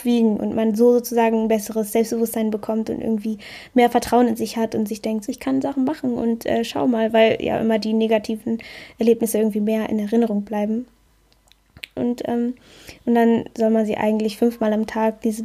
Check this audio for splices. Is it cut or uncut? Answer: cut